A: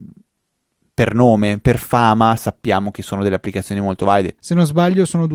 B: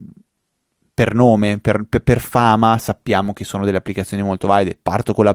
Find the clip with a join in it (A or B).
A